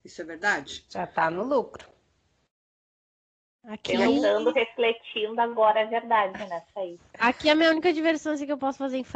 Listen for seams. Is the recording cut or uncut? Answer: cut